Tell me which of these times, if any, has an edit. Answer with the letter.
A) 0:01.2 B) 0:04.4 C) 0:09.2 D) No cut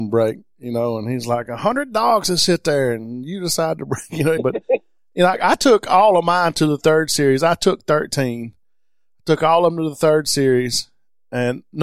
B